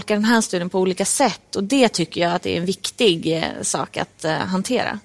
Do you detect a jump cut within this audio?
no; 0 cuts

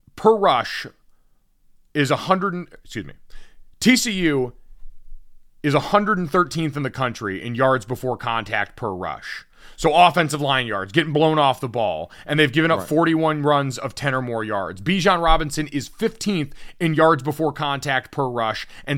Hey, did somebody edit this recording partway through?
no; 0 cuts

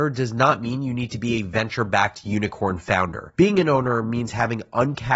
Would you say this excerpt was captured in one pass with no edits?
no; 1 cut; at 3.3 s

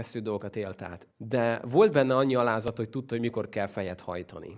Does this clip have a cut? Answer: yes; 1 cut; at 1.1 s

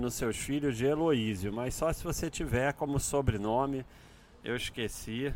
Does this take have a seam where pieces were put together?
no; 0 cuts

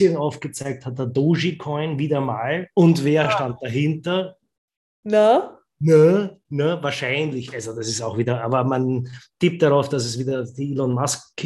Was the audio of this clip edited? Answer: no; 0 cuts

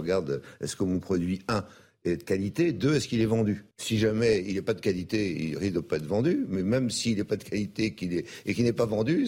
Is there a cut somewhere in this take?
yes; 1 cut; at 3.7 s

